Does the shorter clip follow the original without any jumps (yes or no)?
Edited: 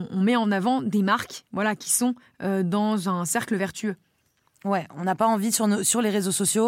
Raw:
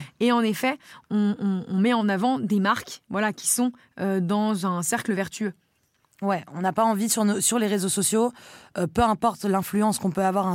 yes